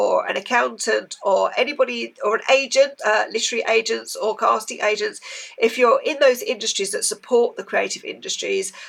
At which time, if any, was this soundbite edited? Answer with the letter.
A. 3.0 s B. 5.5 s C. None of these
A